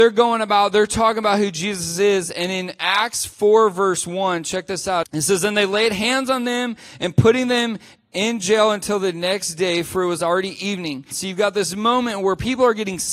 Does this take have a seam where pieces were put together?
yes; 2 cuts; at 5.0 s, 11.1 s

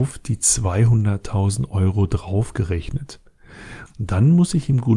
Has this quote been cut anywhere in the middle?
yes; 1 cut; at 3.9 s

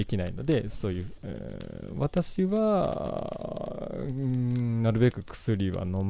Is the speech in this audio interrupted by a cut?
yes; 1 cut; at 1.2 s

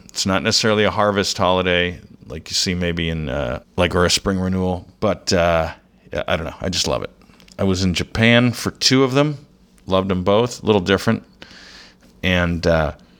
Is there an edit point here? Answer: yes; 1 cut; at 3.6 s

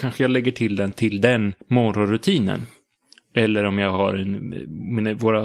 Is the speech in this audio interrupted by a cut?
yes; 1 cut; at 1.6 s

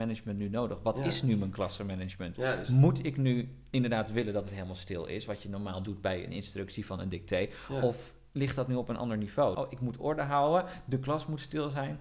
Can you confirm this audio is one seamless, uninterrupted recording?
no; 1 cut; at 9.5 s

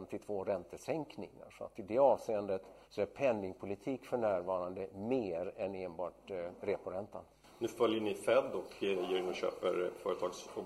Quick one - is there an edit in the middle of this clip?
yes; 1 cut; at 2.8 s

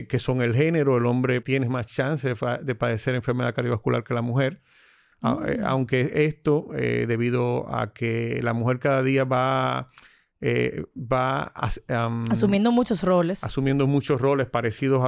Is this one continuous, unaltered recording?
no; 1 cut; at 1.4 s

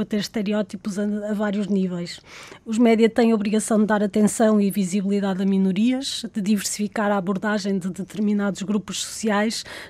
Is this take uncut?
yes; 0 cuts

